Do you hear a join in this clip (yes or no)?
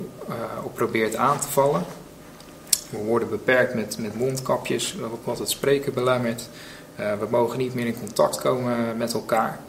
yes